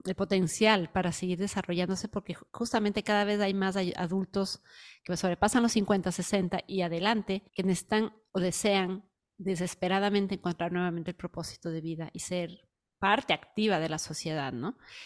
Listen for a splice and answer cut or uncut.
cut